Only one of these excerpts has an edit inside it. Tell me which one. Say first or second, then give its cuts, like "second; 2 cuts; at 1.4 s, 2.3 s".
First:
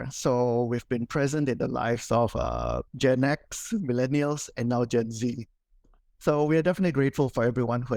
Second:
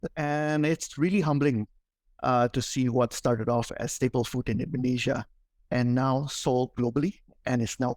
first; 1 cut; at 2.9 s